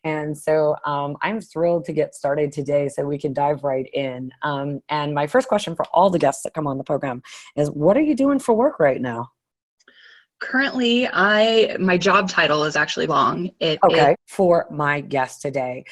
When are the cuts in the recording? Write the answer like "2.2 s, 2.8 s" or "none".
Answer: 13.1 s, 14.1 s